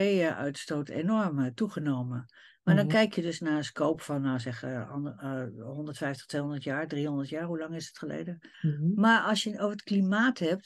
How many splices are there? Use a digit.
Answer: 1